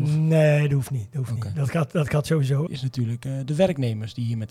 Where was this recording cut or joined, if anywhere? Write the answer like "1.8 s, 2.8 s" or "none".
2.7 s